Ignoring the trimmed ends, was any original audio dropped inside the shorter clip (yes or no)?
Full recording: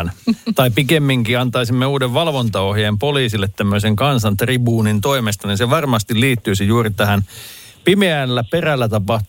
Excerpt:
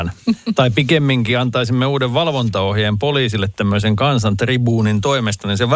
no